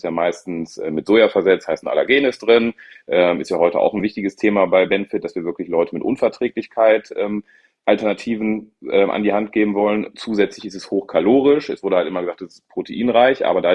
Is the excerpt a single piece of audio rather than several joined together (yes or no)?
yes